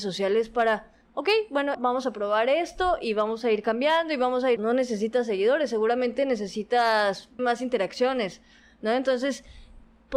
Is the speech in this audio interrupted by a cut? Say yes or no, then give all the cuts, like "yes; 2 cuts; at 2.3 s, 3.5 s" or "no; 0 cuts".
yes; 3 cuts; at 1.7 s, 4.6 s, 7.4 s